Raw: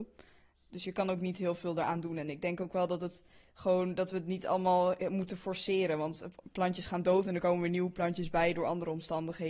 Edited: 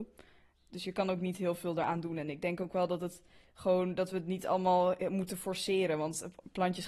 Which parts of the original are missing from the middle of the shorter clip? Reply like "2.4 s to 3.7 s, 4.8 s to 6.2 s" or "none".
none